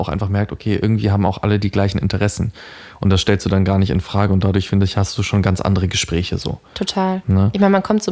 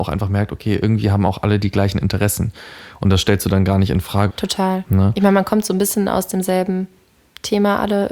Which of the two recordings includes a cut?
second; 1 cut; at 4.3 s

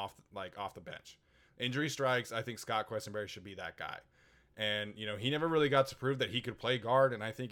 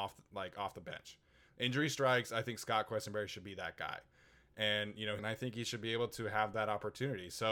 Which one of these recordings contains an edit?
second; 1 cut; at 5.2 s

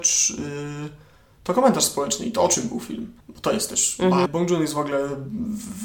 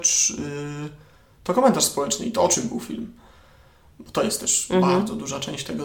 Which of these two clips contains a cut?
first; 2 cuts; at 3.2 s, 4.3 s

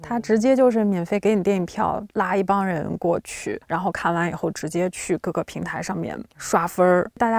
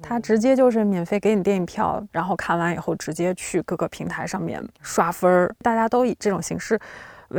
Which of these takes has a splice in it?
second; 1 cut; at 2.1 s

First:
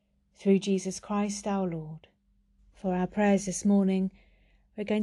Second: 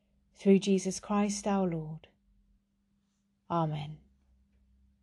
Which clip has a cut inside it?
first; 1 cut; at 2.6 s

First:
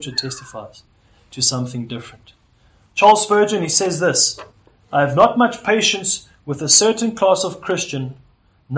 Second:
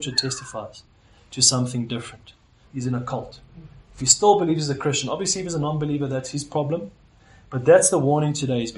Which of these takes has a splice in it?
second; 1 cut; at 2.6 s

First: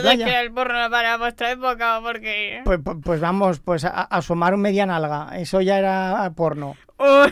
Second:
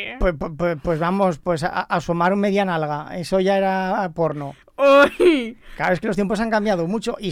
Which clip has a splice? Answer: first; 1 cut; at 3.0 s

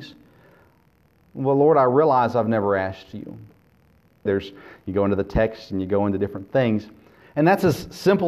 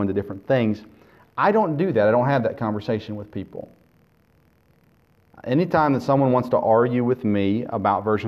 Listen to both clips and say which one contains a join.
first; 2 cuts; at 4.3 s, 7.2 s

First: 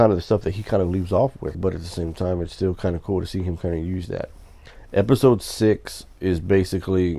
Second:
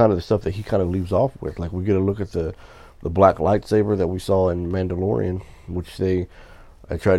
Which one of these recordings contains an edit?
first; 1 cut; at 1.5 s

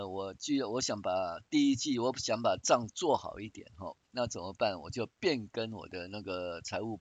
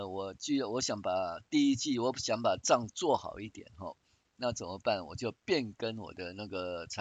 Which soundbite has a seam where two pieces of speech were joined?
first; 1 cut; at 4.0 s

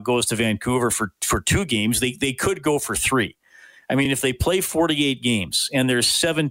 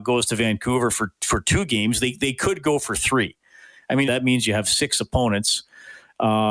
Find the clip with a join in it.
second; 1 cut; at 4.1 s

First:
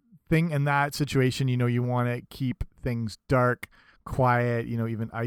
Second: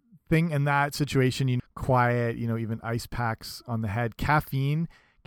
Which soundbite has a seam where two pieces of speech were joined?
second; 1 cut; at 1.6 s

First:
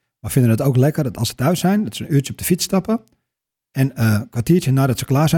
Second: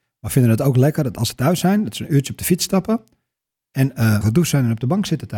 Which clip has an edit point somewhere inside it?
second; 1 cut; at 4.2 s

